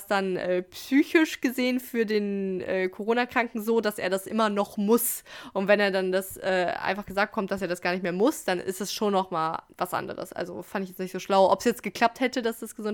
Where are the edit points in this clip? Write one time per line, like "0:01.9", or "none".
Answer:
none